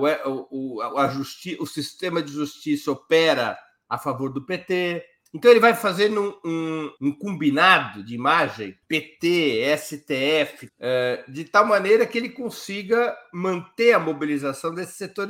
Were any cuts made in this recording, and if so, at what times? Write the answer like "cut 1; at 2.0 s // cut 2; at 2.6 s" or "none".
cut 1; at 7.0 s // cut 2; at 8.8 s // cut 3; at 10.7 s